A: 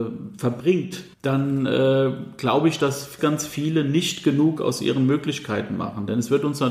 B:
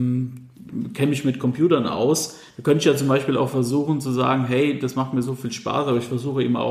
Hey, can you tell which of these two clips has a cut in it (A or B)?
A